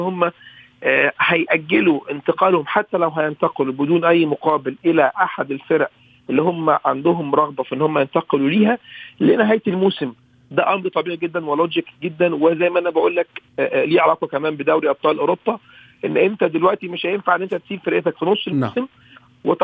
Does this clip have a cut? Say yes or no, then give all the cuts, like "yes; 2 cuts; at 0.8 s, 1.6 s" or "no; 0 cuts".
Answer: no; 0 cuts